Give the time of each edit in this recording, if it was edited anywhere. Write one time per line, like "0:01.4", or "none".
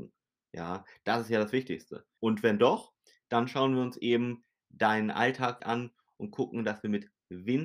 0:02.2
0:05.6